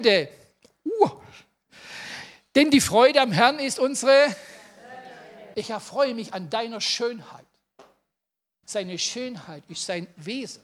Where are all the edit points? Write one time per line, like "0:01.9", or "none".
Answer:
0:05.5
0:08.7